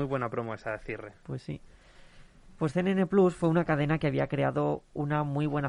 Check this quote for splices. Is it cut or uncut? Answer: uncut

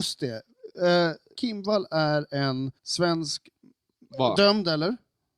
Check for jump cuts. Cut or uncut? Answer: cut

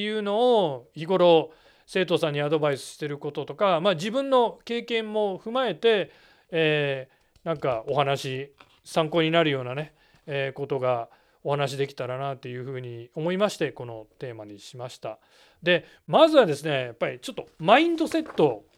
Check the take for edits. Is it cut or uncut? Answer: uncut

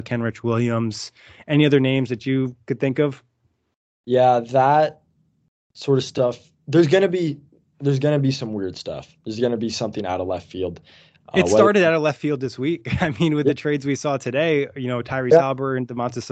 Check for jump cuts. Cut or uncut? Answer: uncut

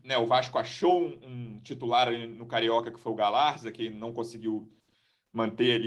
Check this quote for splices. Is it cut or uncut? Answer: uncut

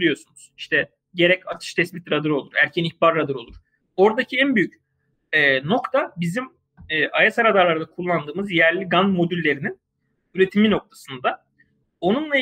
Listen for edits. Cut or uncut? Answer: cut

